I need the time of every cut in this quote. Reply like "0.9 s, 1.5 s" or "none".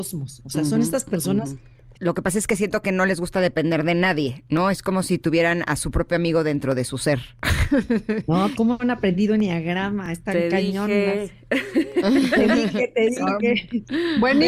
1.9 s, 8.5 s